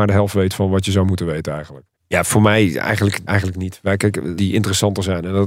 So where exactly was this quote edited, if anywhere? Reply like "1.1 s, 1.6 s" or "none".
1.9 s, 3.3 s, 4.4 s